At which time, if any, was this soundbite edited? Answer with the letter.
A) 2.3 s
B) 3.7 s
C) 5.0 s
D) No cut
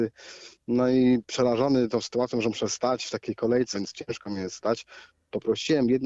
B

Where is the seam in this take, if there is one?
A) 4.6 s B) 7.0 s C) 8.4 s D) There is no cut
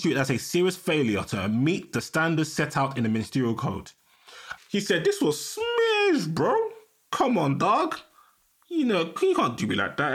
A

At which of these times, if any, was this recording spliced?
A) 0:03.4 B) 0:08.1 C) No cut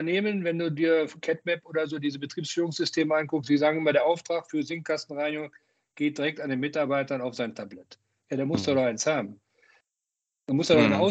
C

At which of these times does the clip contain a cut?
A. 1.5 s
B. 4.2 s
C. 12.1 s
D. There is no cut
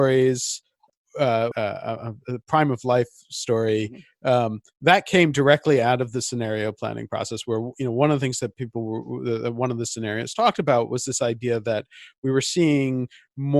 A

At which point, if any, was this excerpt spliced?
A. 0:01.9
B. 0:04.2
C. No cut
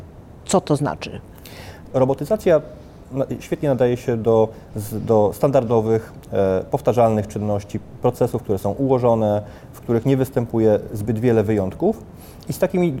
A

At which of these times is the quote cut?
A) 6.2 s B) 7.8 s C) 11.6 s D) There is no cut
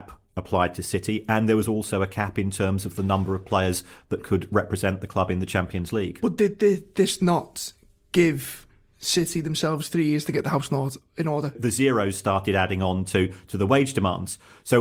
C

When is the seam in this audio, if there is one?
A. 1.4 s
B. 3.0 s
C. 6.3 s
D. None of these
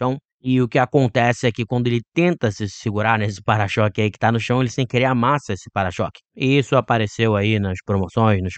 C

